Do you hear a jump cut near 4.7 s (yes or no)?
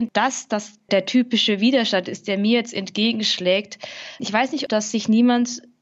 yes